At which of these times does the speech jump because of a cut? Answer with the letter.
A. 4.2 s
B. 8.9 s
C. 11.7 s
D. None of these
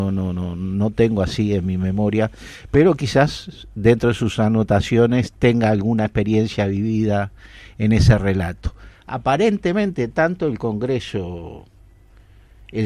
D